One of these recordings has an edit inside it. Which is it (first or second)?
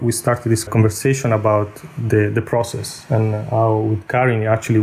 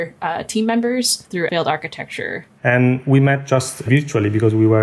second